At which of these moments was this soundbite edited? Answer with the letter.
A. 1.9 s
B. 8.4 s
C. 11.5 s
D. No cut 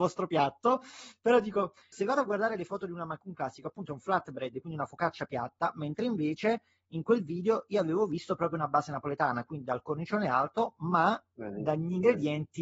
A